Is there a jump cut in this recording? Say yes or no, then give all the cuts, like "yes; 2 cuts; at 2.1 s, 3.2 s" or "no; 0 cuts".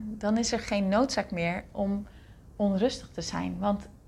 no; 0 cuts